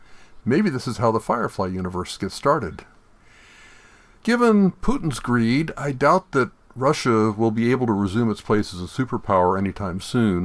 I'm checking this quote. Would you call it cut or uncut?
uncut